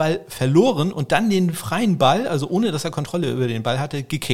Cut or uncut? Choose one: uncut